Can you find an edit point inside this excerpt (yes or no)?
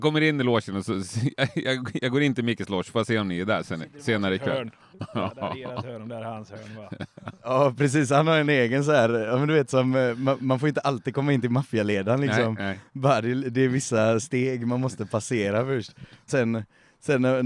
yes